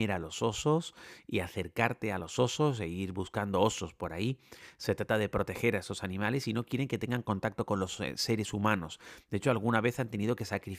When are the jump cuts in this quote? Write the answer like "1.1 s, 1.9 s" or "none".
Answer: none